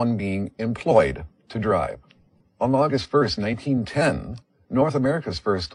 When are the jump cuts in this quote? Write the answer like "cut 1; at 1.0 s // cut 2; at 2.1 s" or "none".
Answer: cut 1; at 2.4 s